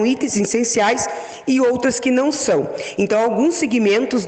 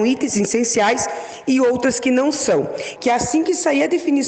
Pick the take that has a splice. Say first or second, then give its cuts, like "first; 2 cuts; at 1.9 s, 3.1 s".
second; 1 cut; at 3.0 s